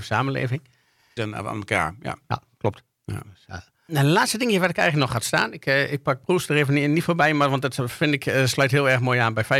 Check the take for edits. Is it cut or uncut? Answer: cut